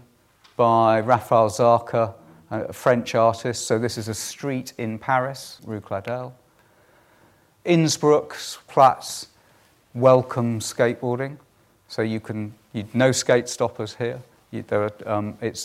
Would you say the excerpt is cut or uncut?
cut